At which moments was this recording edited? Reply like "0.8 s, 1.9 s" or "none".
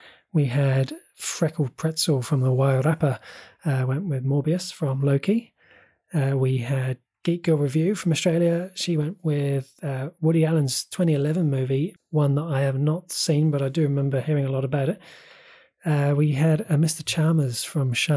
12.0 s